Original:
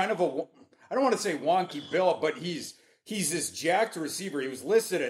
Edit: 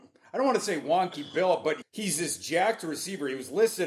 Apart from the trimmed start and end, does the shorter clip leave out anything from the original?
yes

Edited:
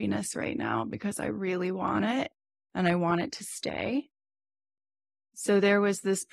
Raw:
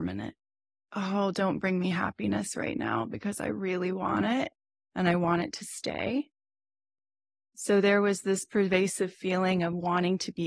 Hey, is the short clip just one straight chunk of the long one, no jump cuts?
yes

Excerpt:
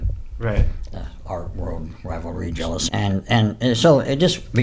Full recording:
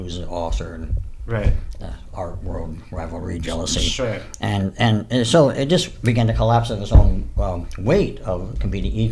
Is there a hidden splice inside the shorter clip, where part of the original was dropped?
yes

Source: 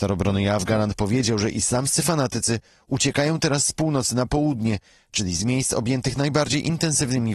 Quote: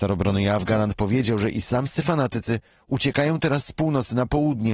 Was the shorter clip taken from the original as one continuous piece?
yes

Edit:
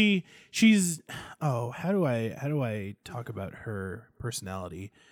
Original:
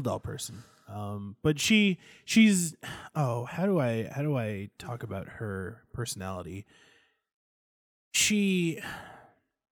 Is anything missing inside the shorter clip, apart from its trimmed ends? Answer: no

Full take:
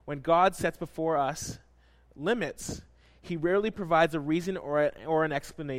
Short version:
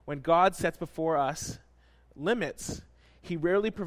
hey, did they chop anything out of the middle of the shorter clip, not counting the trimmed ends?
no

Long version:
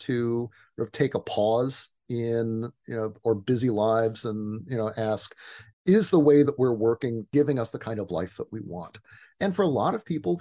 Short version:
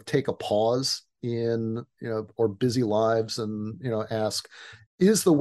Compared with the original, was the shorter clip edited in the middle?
no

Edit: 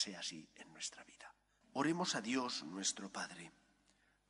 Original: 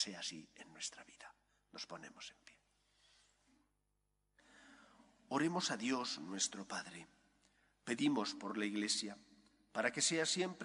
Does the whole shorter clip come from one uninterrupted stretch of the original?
no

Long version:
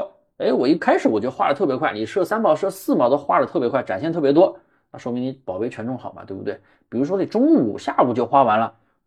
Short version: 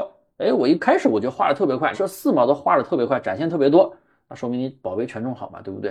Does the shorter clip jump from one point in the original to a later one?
yes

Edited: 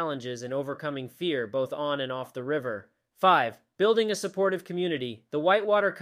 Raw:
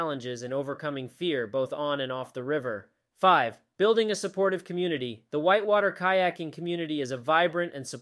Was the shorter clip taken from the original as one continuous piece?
yes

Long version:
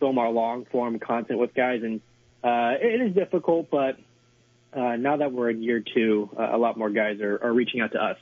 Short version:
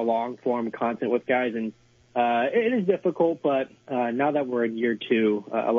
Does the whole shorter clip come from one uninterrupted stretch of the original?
no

